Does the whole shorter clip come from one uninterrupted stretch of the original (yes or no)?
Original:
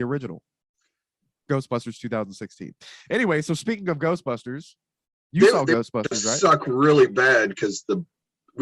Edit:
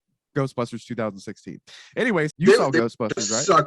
no